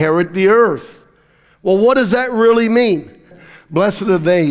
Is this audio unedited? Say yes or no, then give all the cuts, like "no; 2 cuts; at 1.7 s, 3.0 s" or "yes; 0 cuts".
no; 1 cut; at 3.3 s